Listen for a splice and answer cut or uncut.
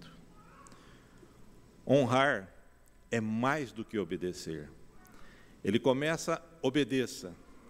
uncut